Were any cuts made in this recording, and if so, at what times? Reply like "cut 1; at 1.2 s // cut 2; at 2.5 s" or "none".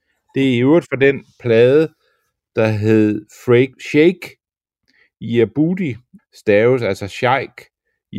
cut 1; at 3.7 s // cut 2; at 6.2 s